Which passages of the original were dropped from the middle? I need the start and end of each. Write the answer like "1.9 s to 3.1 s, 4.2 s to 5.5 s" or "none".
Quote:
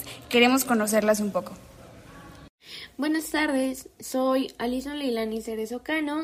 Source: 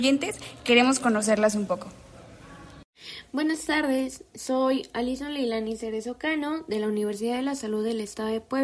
none